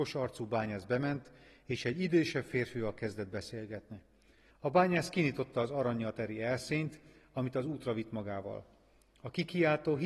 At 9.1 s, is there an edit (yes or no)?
no